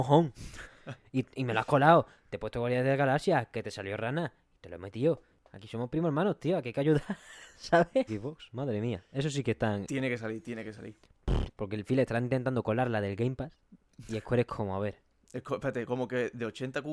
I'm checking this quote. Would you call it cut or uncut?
cut